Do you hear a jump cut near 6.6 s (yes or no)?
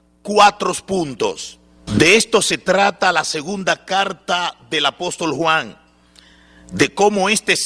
no